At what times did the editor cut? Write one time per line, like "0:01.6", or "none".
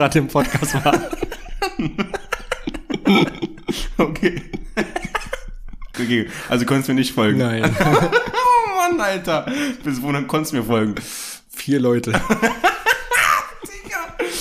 0:05.9